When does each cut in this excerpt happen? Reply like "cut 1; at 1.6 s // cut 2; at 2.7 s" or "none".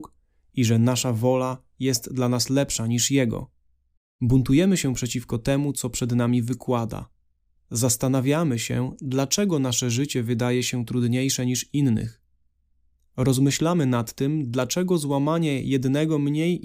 cut 1; at 7.6 s